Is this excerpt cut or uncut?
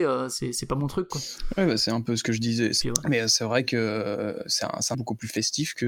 cut